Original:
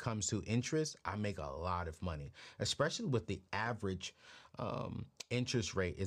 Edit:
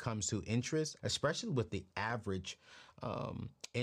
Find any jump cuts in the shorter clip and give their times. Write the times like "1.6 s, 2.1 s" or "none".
1.0 s